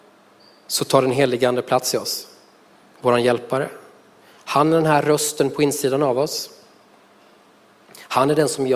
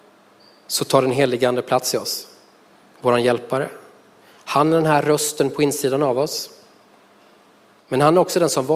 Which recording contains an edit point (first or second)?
second